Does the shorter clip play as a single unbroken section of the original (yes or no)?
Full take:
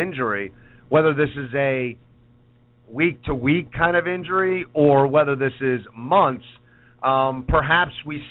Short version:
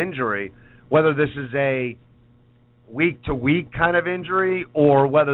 yes